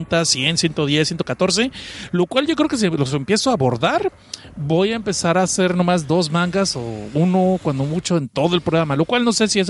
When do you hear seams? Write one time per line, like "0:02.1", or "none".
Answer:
none

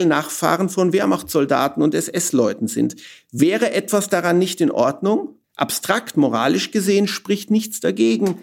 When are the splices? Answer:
0:05.4

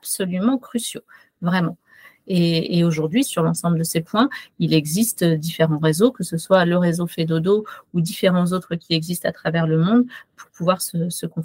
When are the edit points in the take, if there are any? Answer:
0:03.2

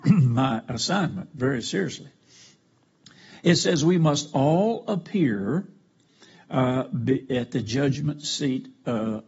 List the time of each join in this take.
none

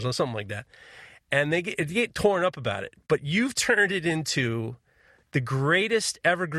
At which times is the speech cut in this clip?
none

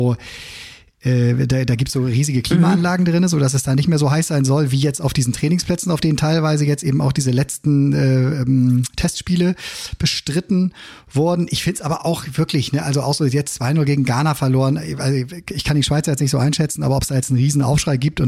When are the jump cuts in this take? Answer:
none

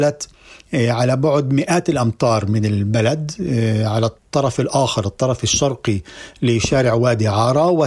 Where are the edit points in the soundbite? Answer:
0:04.2

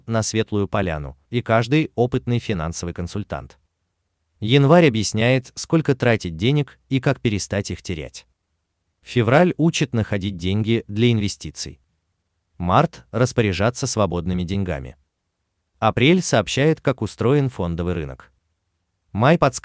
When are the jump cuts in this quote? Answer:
0:01.3

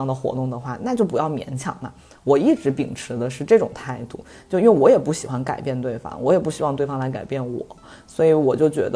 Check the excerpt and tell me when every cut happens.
none

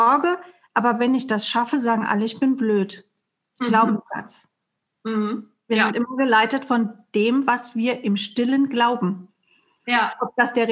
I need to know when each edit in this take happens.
none

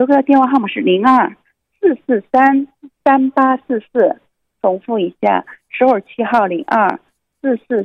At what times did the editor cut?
none

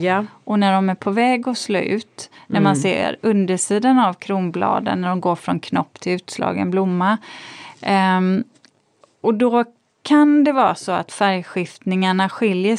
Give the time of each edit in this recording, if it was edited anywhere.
none

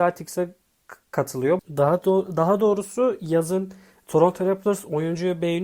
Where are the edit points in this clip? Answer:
0:01.6

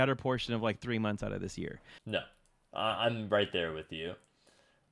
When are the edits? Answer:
0:02.0

